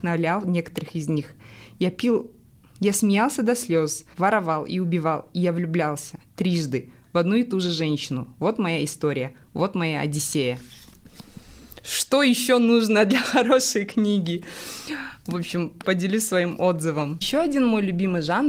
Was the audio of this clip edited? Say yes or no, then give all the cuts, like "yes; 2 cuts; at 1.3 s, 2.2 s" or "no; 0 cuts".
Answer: yes; 2 cuts; at 4.1 s, 15.8 s